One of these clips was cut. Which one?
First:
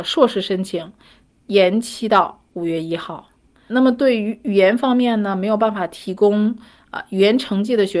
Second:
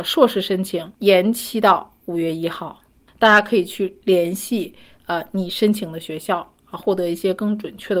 second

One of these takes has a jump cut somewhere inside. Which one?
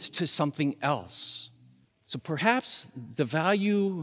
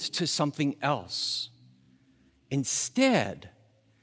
first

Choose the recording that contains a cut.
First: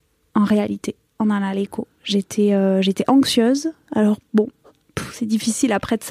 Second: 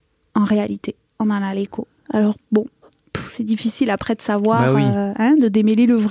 second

